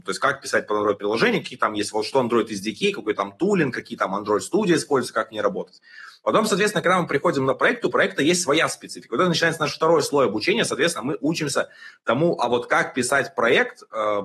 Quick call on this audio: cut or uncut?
uncut